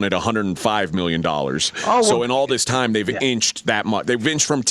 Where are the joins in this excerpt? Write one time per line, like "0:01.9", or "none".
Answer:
0:03.6